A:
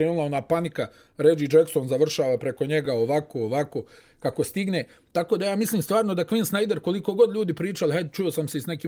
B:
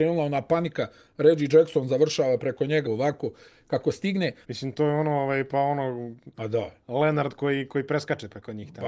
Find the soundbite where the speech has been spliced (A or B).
B